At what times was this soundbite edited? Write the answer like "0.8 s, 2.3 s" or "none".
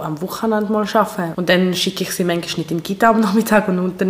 1.3 s